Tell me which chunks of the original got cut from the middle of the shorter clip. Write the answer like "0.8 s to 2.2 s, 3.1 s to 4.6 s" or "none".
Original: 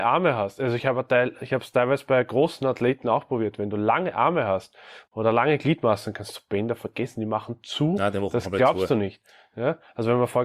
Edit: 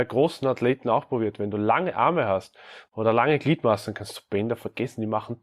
none